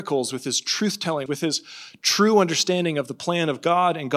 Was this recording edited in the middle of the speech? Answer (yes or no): yes